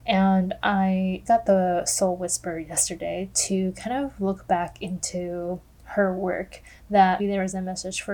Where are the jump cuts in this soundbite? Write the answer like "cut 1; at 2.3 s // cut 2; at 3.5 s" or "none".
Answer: cut 1; at 1.3 s // cut 2; at 7.2 s